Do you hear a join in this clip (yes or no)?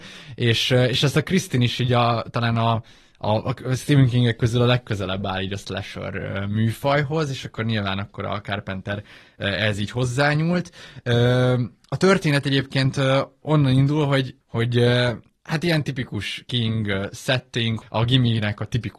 yes